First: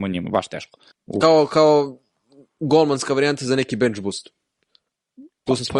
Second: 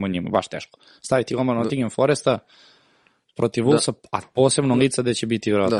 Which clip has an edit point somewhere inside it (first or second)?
first